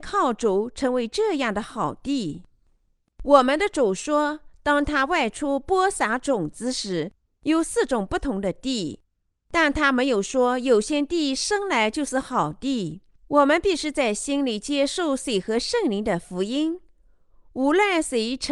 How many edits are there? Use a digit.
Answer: 1